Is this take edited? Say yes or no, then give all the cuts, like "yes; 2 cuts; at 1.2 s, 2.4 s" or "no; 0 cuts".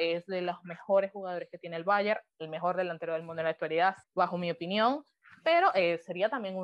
yes; 1 cut; at 4.0 s